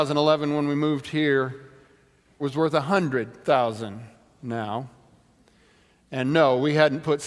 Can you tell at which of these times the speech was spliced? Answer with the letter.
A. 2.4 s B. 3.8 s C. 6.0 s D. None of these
A